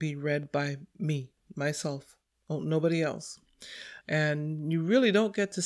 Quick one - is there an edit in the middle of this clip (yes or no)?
yes